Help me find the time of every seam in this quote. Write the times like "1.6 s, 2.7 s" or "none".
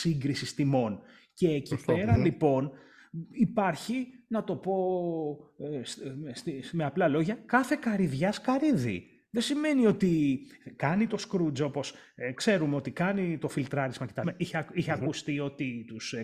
12.3 s, 14.2 s